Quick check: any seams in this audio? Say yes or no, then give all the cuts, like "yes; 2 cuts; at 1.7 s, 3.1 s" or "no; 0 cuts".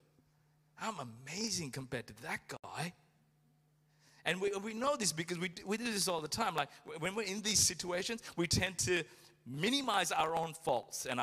no; 0 cuts